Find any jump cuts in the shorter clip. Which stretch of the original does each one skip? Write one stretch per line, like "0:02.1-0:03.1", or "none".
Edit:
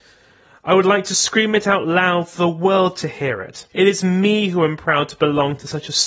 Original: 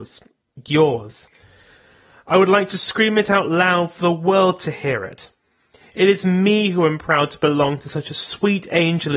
0:05.3-0:05.9